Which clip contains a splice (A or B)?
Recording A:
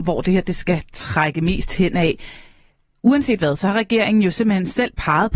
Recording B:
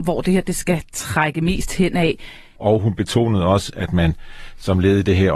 B